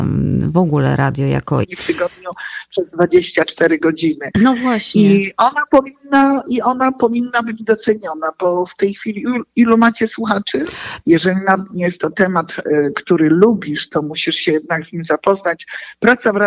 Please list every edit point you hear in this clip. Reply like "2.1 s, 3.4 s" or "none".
1.6 s, 11.0 s